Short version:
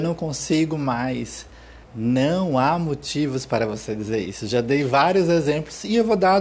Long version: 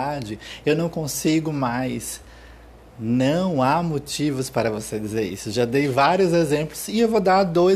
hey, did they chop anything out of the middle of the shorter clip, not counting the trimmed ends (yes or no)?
yes